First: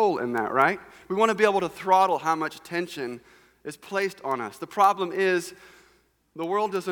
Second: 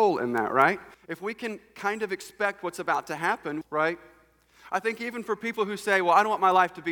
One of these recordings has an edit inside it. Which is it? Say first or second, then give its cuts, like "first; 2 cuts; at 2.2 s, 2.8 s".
second; 2 cuts; at 0.9 s, 3.6 s